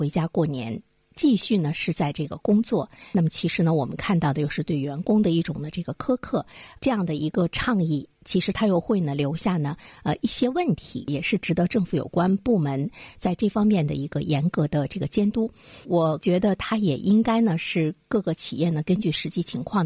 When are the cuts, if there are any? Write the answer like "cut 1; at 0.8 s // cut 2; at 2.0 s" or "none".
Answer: cut 1; at 15.8 s